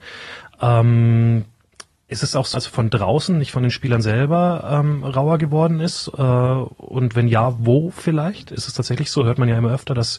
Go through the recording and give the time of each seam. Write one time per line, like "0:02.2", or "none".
0:02.5